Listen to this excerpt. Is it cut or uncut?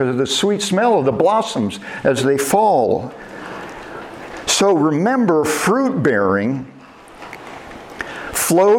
uncut